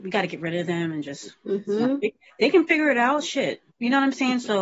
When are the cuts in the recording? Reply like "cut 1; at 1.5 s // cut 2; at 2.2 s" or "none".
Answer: cut 1; at 3.7 s